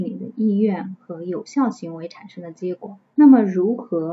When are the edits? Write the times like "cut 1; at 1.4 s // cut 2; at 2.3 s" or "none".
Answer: cut 1; at 3.1 s